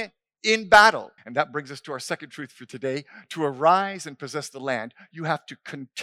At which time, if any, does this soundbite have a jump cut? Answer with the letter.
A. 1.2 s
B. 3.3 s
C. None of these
A